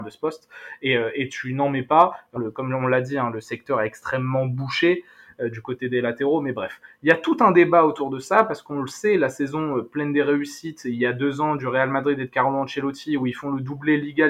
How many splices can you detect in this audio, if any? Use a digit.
1